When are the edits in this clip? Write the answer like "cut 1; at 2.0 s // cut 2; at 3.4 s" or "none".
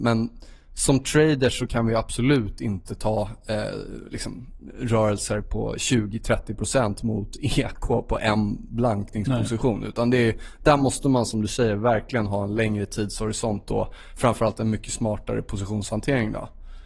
none